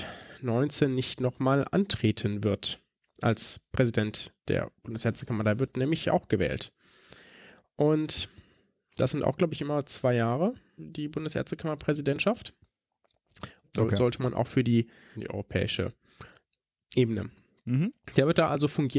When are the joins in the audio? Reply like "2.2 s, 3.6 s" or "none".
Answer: 10.8 s, 13.6 s, 15.1 s